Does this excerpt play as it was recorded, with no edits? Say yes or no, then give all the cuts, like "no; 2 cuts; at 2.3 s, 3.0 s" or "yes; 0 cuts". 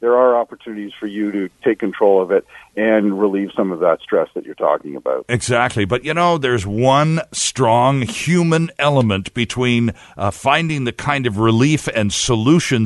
yes; 0 cuts